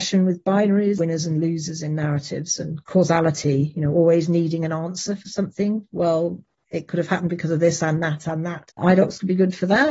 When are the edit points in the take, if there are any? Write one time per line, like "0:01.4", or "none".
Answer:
0:05.9
0:08.7